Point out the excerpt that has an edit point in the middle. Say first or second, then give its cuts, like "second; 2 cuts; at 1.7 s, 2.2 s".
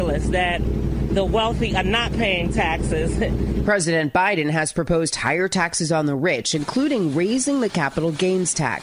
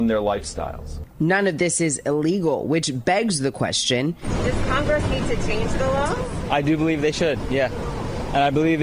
first; 1 cut; at 3.6 s